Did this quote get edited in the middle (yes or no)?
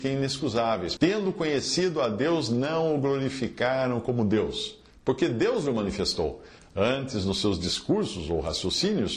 yes